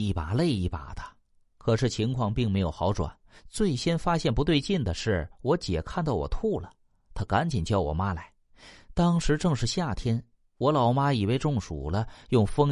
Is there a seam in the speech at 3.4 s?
yes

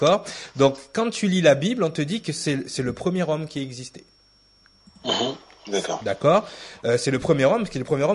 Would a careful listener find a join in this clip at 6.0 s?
no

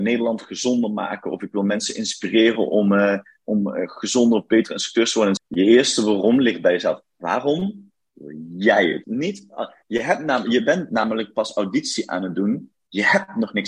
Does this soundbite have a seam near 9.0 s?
yes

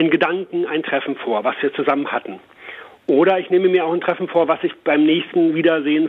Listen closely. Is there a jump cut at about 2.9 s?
no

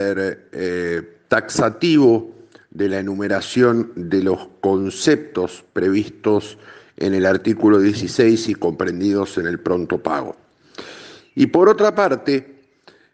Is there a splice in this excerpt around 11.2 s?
yes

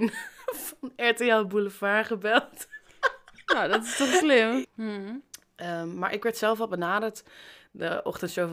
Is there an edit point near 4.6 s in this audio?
yes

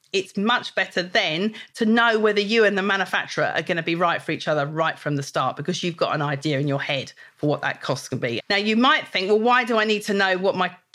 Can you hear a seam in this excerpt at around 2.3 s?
no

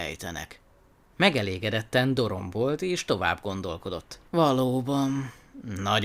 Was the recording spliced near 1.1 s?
no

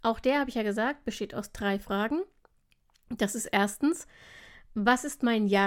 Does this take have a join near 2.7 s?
no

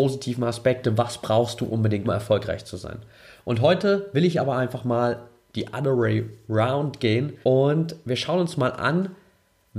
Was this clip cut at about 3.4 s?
no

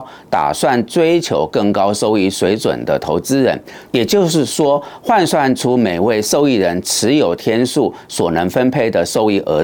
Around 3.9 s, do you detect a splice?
yes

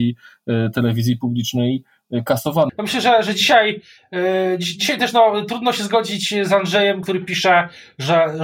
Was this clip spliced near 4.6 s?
no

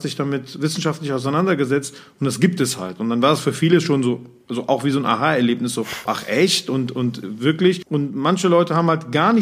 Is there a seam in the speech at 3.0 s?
no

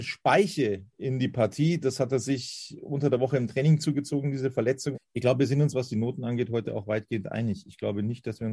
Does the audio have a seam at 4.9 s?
yes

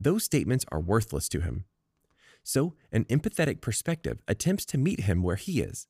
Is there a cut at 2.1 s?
no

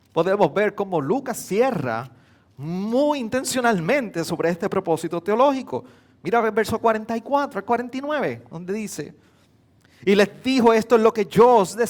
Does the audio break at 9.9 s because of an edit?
no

